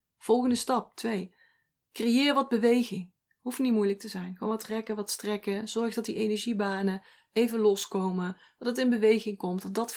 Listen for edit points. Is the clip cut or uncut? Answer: uncut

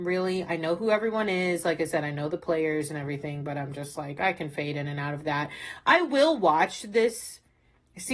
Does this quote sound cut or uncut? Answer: uncut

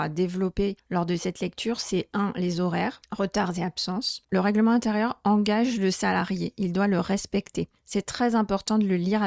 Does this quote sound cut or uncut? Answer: cut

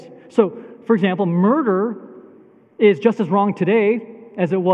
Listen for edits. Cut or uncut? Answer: uncut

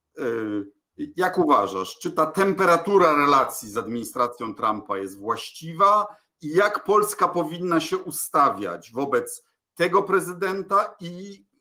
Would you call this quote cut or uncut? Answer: uncut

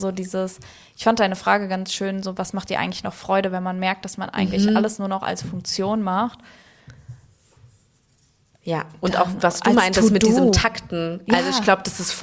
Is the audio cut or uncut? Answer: uncut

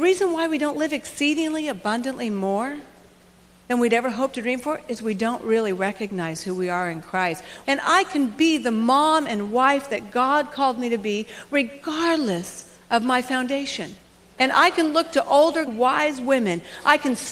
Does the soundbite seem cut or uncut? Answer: cut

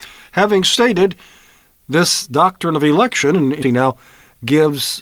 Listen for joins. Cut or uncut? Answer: cut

